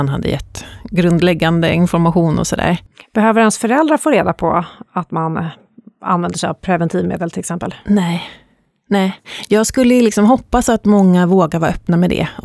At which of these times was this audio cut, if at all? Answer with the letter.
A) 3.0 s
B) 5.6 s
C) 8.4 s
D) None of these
D